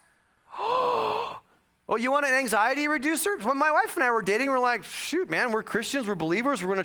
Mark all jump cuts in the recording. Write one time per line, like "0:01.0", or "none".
none